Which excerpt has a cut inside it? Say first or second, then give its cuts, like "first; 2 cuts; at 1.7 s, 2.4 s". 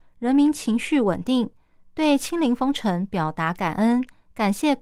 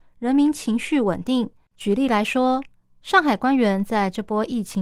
second; 1 cut; at 1.7 s